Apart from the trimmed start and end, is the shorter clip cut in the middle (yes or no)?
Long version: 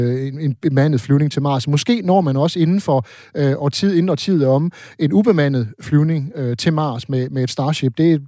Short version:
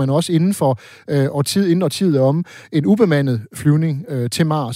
no